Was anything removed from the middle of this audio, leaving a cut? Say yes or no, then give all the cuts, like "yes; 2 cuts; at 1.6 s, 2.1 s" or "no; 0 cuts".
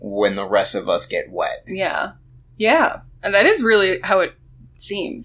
no; 0 cuts